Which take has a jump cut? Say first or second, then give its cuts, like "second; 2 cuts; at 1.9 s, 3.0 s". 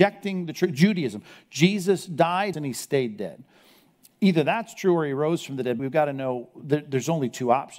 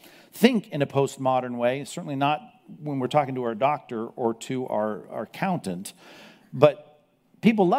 first; 2 cuts; at 2.5 s, 5.8 s